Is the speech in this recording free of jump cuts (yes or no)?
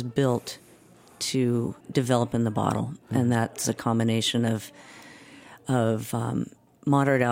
no